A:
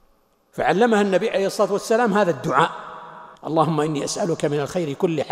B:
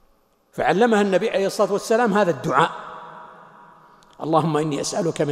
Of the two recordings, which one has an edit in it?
A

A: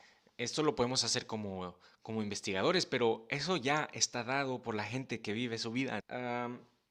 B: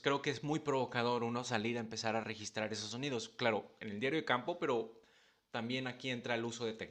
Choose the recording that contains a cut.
A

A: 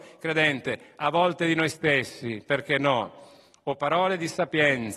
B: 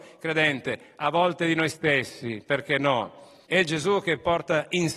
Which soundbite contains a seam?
B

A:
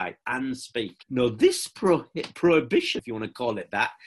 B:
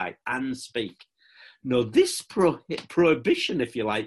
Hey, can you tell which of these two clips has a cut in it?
A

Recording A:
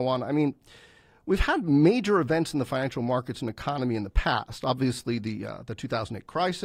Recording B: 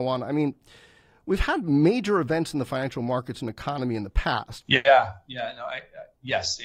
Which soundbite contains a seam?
B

